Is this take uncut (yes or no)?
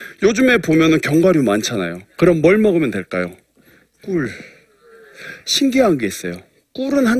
no